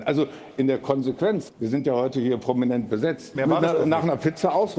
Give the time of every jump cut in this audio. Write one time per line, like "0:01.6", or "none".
0:01.5
0:03.4